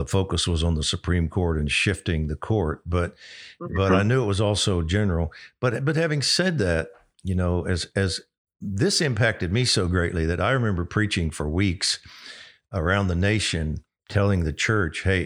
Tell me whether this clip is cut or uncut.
uncut